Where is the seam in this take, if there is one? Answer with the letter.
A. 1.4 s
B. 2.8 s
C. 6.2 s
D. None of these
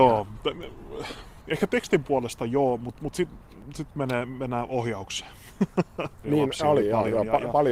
C